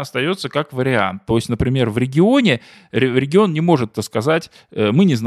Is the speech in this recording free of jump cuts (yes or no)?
no